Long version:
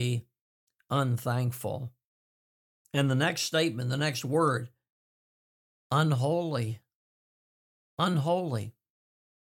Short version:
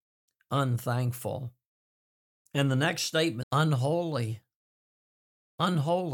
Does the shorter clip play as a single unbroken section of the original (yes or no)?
no